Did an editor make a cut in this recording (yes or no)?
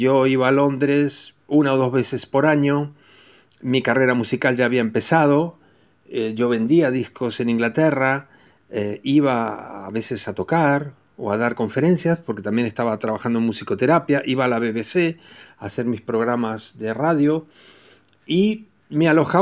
no